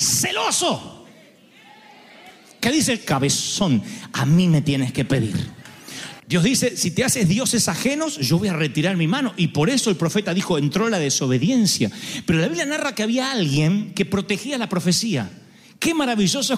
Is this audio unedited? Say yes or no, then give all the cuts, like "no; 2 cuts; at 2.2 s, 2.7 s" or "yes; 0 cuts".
no; 1 cut; at 6.2 s